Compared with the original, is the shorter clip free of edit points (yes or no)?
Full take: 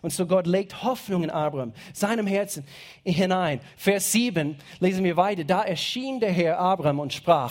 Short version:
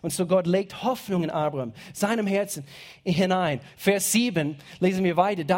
yes